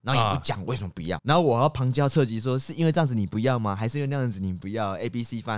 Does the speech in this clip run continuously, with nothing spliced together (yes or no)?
no